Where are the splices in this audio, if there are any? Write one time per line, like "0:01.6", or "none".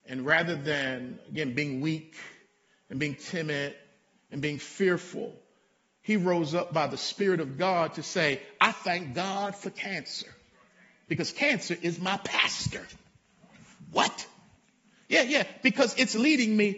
none